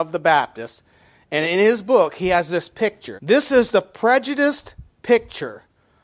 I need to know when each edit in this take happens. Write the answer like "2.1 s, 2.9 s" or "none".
3.2 s